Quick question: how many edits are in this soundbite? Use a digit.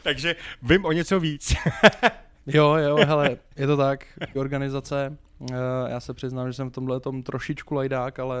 1